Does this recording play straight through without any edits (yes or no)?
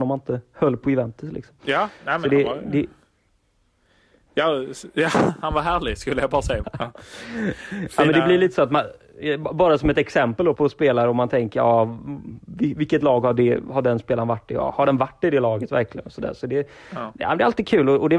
no